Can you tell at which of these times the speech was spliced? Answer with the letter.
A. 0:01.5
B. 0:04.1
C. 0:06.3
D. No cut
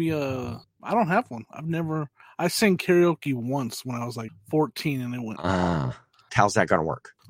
C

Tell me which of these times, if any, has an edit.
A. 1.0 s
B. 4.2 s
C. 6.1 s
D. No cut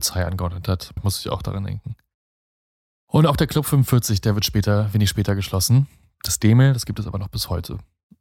A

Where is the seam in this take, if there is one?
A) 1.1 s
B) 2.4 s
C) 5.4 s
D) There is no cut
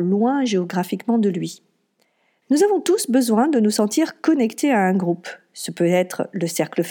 B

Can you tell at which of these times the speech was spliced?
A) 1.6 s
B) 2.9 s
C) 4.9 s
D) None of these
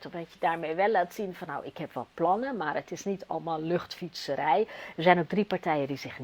C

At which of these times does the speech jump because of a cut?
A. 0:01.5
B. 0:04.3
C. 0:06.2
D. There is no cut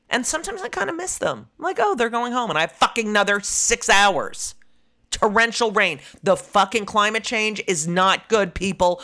A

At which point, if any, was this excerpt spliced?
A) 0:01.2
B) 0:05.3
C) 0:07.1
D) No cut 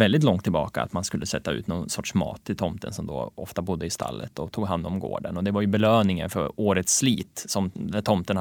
D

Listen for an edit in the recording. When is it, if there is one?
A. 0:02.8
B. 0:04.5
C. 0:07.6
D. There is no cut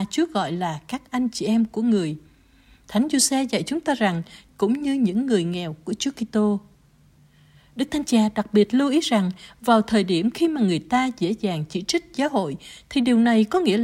B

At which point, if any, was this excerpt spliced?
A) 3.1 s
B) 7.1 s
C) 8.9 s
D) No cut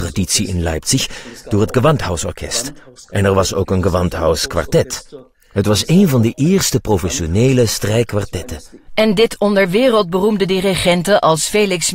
C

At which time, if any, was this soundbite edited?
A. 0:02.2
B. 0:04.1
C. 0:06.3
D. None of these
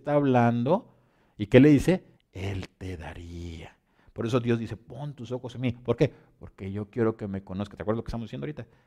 A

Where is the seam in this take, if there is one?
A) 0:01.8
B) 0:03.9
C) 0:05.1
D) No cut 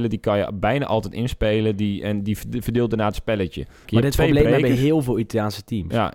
B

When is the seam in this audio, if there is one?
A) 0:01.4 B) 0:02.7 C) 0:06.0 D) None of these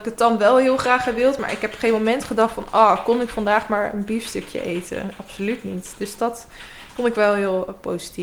D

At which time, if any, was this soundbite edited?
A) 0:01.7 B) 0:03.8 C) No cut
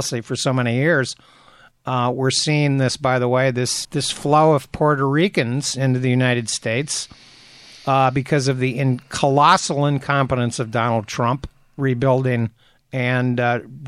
B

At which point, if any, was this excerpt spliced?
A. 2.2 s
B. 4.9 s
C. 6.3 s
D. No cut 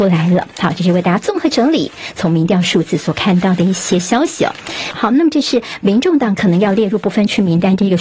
B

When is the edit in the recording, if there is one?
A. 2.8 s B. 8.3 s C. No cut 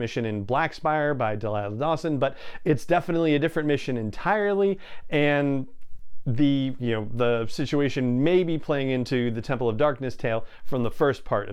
C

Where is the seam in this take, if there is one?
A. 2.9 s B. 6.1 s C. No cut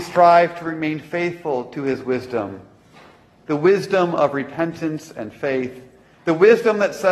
C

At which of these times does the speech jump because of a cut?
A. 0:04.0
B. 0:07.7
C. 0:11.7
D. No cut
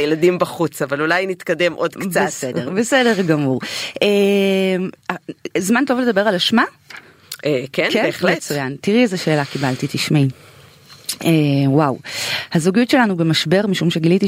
D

